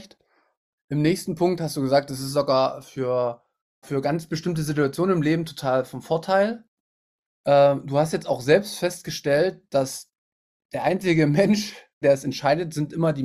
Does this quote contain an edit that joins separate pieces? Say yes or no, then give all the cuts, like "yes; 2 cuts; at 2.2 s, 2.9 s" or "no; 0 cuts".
yes; 2 cuts; at 3.8 s, 12.0 s